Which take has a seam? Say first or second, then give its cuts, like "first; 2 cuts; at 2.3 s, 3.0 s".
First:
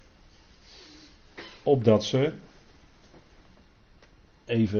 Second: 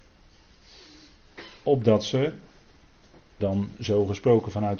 second; 1 cut; at 3.4 s